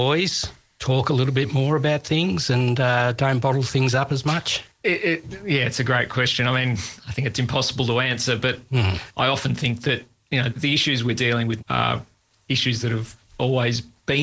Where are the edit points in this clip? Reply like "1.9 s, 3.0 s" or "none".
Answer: 10.5 s, 11.6 s